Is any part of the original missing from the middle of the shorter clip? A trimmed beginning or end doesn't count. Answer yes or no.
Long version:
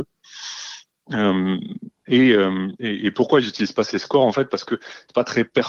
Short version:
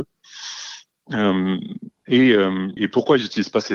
yes